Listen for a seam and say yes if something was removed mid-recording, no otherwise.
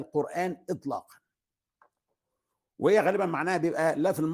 no